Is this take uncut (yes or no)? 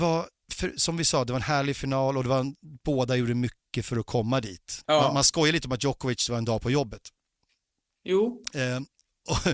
no